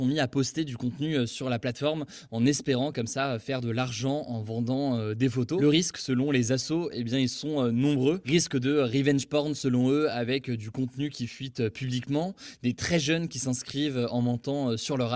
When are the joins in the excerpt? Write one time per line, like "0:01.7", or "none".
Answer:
none